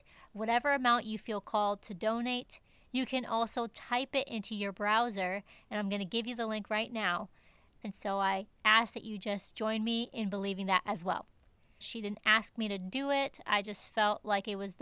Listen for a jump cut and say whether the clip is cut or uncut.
cut